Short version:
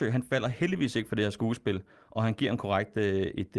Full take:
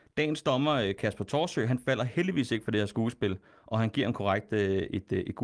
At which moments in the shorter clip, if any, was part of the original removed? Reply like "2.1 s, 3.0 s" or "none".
none

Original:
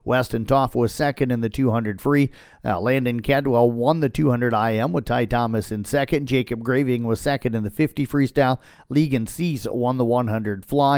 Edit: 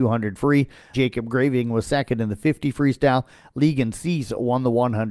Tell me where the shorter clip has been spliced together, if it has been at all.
0.9 s

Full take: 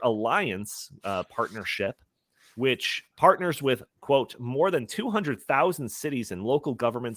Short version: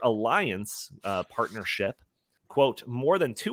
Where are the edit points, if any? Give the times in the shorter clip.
2.4 s

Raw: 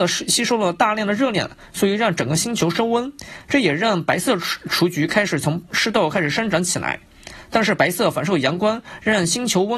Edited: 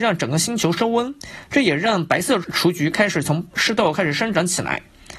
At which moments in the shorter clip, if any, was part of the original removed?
2.4 s

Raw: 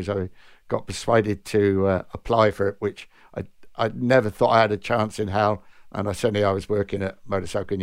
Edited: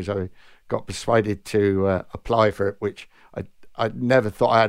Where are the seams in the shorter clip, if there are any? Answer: none

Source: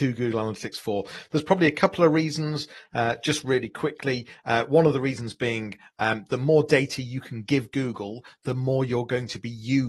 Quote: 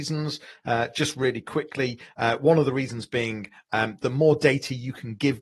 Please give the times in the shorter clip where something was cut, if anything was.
none

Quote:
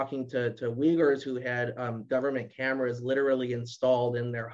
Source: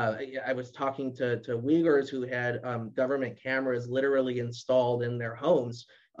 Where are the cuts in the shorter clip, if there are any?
none

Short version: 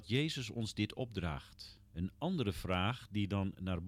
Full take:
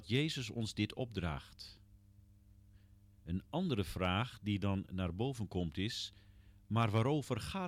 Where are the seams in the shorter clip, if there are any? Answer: 1.9 s

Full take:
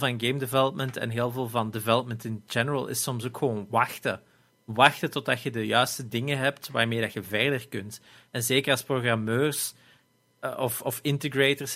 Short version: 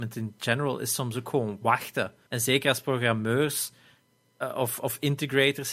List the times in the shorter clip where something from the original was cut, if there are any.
2.3 s

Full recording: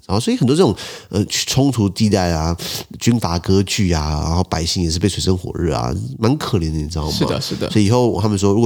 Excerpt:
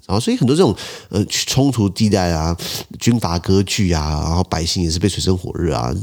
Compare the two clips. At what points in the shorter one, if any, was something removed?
none

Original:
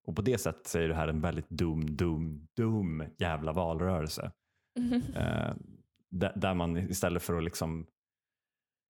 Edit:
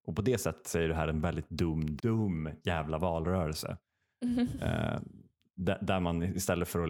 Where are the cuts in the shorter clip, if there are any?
2.0 s

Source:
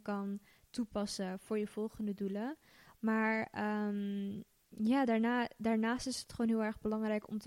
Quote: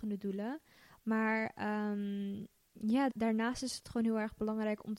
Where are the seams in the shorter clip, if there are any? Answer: 3.1 s

